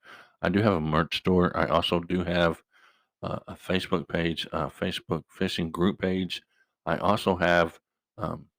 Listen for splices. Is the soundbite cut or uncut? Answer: uncut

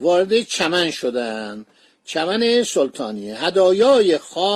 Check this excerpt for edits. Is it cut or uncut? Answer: uncut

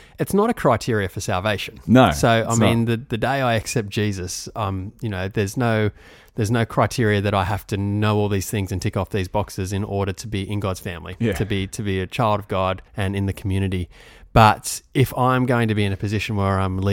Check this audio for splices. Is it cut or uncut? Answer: cut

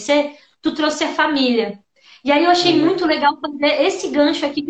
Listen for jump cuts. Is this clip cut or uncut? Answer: uncut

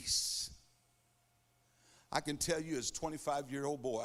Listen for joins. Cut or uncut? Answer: uncut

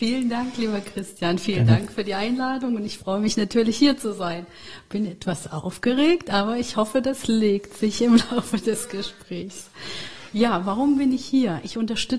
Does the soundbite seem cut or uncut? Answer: uncut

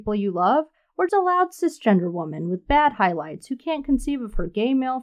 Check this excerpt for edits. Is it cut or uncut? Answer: cut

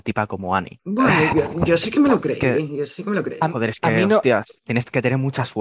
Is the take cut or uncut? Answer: uncut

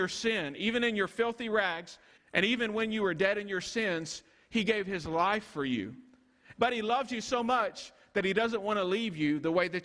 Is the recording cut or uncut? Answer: cut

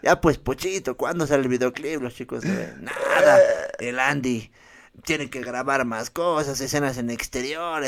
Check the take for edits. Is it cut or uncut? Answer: uncut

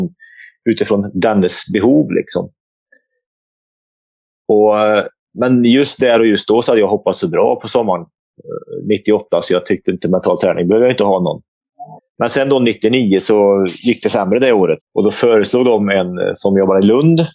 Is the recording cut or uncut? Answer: cut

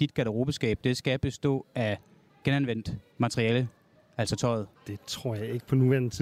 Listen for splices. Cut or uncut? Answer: cut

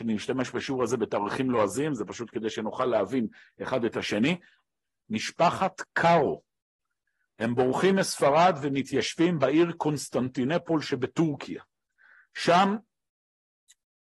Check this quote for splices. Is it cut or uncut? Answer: cut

